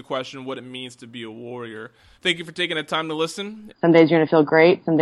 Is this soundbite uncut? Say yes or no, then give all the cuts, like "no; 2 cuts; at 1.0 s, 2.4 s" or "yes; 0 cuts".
no; 2 cuts; at 2.1 s, 3.7 s